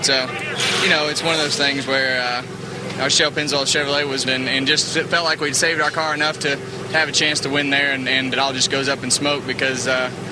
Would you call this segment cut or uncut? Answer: cut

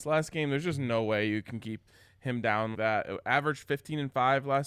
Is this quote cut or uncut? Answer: cut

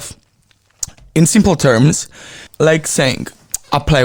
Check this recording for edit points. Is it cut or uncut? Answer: cut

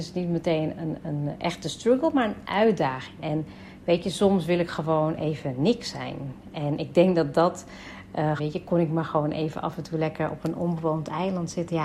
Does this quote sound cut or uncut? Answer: cut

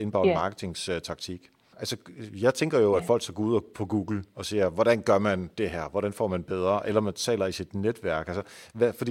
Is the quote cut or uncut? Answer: cut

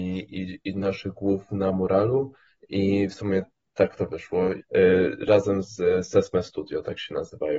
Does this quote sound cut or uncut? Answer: cut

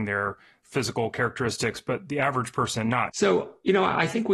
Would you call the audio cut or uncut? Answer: cut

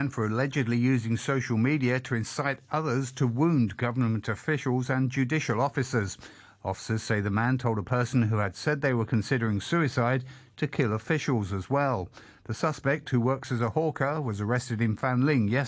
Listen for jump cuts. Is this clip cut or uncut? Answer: uncut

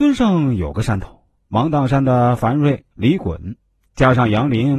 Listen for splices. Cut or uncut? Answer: cut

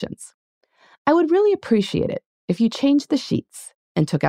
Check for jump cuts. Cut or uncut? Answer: uncut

